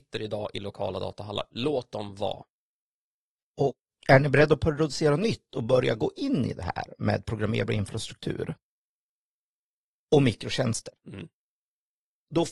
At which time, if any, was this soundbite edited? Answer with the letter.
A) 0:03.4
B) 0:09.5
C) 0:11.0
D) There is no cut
A